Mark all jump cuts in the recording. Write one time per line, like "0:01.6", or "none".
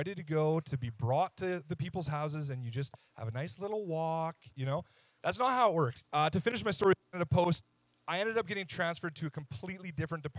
0:06.0